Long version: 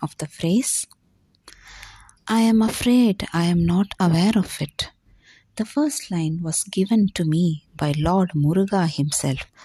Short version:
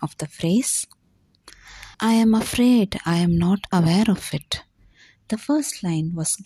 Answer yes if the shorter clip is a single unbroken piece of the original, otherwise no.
no